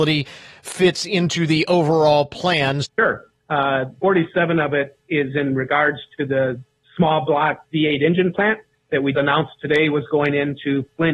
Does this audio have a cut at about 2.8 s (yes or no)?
yes